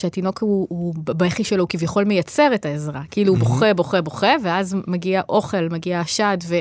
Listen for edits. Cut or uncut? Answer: uncut